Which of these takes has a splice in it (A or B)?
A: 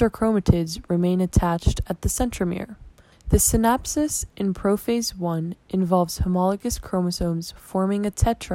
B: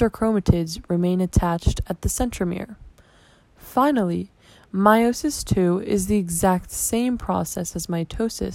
A